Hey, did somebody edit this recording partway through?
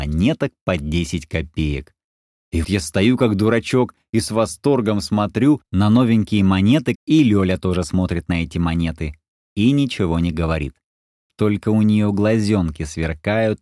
yes; 2 cuts; at 2.6 s, 7.0 s

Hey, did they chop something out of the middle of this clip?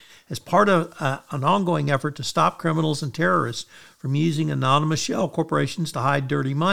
no; 0 cuts

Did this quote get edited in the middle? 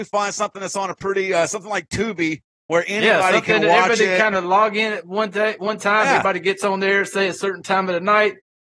no; 0 cuts

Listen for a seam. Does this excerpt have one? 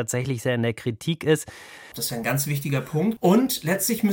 yes; 2 cuts; at 1.9 s, 3.2 s

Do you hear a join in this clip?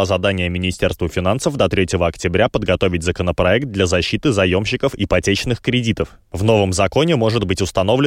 no; 0 cuts

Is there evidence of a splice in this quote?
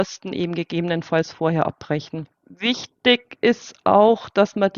no; 0 cuts

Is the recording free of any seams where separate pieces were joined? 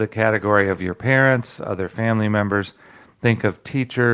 yes; 0 cuts

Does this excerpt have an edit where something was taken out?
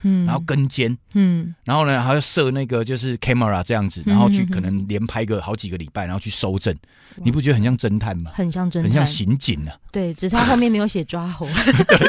no; 0 cuts

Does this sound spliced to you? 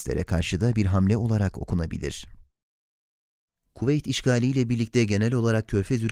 no; 0 cuts

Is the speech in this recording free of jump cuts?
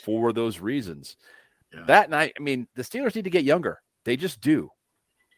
yes; 0 cuts

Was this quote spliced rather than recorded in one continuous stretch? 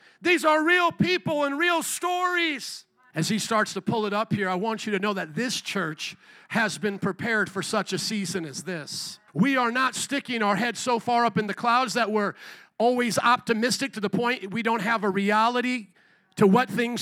yes; 2 cuts; at 3.1 s, 9.3 s

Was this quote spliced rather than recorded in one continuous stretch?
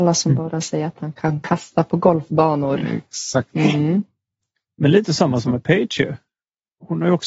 no; 0 cuts

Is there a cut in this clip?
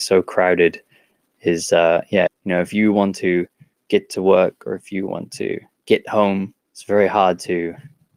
yes; 2 cuts; at 2.3 s, 6.6 s

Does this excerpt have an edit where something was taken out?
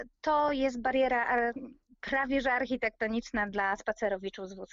no; 0 cuts

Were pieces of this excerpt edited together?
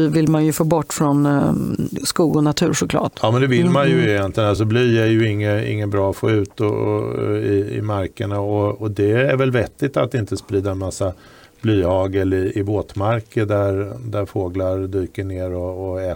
no; 0 cuts

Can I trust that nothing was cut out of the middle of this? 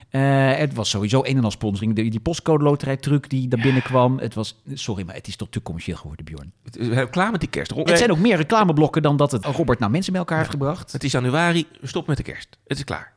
no; 1 cut; at 7.9 s

